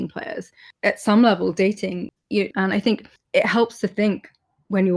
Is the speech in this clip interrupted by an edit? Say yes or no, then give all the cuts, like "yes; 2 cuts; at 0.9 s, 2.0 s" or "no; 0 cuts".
yes; 1 cut; at 2.5 s